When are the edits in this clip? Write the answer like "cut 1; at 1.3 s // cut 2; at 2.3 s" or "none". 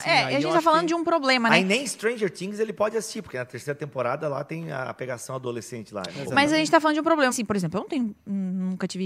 cut 1; at 6.1 s // cut 2; at 7.3 s